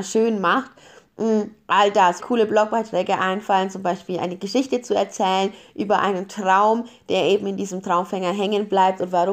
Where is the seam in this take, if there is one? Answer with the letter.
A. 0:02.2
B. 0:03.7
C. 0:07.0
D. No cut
A